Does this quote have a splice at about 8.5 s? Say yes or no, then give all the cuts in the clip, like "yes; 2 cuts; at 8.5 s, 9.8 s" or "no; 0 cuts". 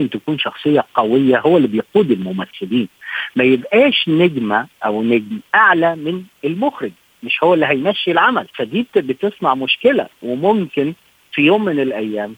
yes; 1 cut; at 8.5 s